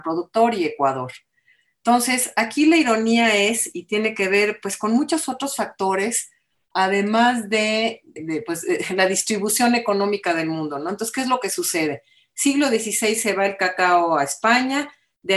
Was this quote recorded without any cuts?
no; 1 cut; at 8.2 s

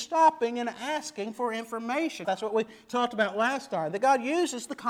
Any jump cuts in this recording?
yes; 1 cut; at 2.2 s

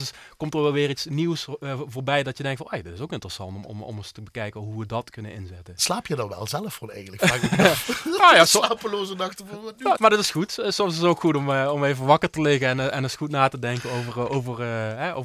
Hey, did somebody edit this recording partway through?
yes; 1 cut; at 9.9 s

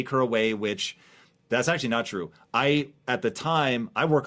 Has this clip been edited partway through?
no; 0 cuts

